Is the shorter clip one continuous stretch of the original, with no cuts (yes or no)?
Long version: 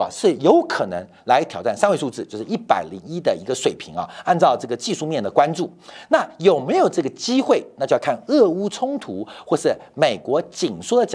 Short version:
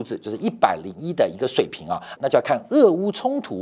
no